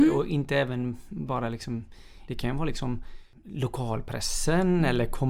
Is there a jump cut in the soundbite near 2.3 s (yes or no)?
yes